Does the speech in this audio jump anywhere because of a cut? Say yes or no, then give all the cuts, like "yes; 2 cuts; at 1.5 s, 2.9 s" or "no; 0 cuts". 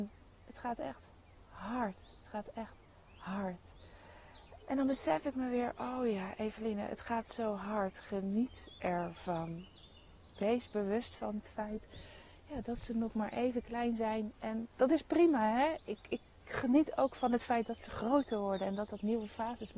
yes; 1 cut; at 4.6 s